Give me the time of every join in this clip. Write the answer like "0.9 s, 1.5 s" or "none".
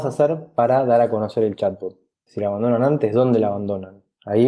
2.3 s